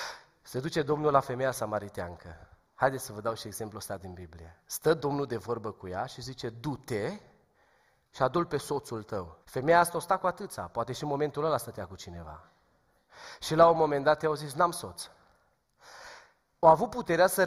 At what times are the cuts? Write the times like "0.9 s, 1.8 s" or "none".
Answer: 9.4 s